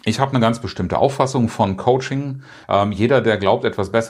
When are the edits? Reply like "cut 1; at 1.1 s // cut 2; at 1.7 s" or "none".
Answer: cut 1; at 2.6 s